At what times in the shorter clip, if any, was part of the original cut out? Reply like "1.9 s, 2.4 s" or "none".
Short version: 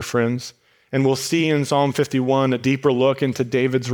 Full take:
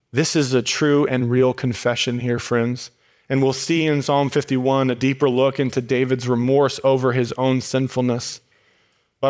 none